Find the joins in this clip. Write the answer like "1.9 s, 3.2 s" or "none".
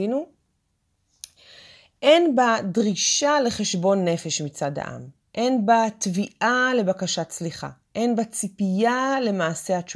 none